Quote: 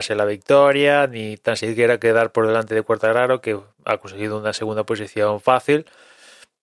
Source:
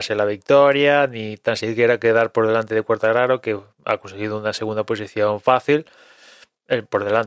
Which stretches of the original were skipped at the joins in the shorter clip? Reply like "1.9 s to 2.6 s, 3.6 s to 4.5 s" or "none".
none